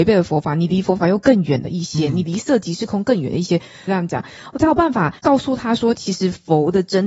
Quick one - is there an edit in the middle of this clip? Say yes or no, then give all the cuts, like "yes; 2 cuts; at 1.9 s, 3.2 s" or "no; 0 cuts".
yes; 2 cuts; at 3.9 s, 5.2 s